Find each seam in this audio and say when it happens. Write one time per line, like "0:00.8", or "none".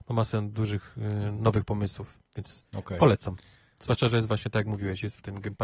none